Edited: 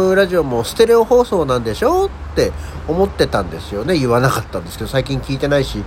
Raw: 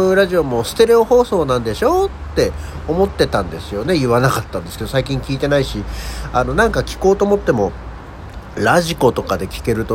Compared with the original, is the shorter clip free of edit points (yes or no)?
yes